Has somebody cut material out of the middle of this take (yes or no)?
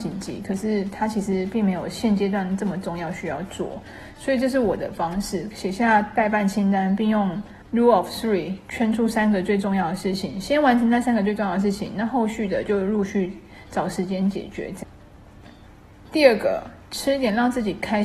yes